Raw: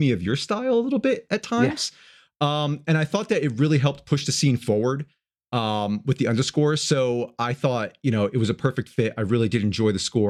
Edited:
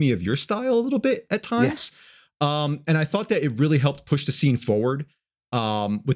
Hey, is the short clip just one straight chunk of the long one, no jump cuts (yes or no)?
yes